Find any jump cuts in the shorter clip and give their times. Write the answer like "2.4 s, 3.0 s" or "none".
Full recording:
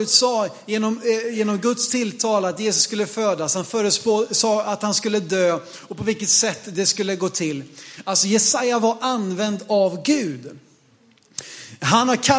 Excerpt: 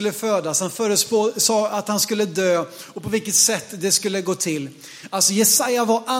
none